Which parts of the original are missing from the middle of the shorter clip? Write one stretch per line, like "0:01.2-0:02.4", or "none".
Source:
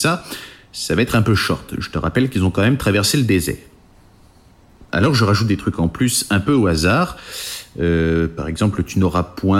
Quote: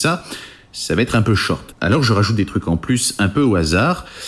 0:01.7-0:04.8